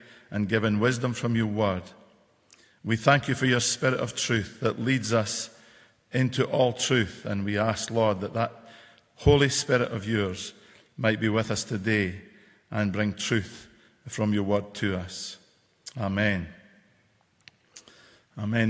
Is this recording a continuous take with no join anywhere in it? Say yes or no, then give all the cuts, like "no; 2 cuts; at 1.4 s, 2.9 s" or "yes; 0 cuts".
no; 1 cut; at 15.9 s